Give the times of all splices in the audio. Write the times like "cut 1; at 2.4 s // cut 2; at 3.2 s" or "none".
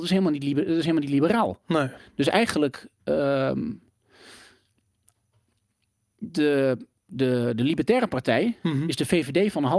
none